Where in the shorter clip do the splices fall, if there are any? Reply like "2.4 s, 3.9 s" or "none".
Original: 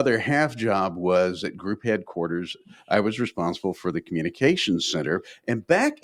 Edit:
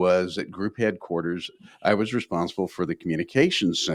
none